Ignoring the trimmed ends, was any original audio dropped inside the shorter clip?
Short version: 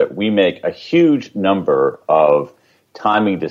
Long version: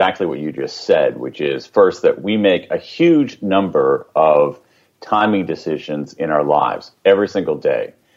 no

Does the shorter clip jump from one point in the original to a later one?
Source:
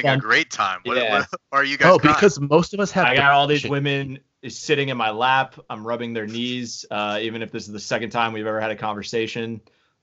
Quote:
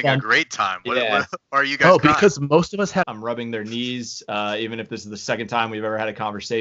yes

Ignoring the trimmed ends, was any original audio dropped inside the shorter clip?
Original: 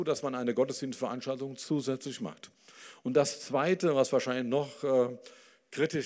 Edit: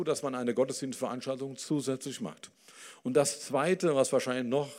no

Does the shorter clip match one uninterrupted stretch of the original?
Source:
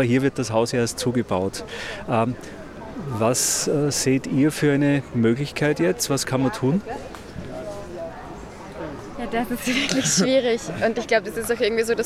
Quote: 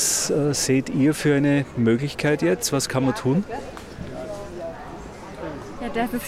yes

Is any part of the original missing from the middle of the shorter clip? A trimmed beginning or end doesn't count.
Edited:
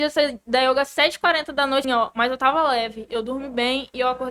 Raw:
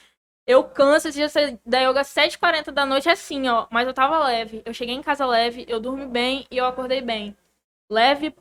yes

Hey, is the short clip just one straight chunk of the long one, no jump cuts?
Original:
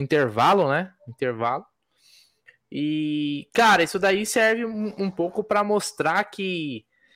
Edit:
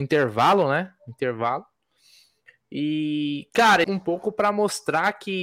no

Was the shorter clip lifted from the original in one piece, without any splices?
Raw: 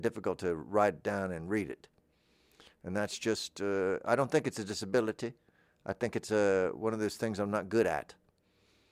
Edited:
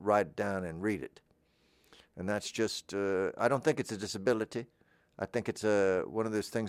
yes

